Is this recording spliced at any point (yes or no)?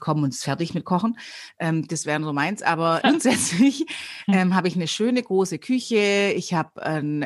yes